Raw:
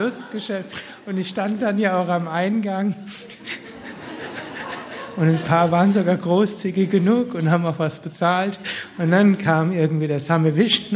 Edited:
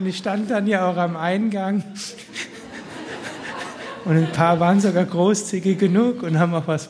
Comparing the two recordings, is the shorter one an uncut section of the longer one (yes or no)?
yes